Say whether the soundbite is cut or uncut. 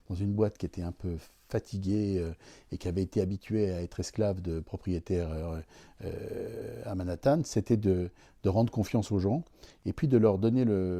uncut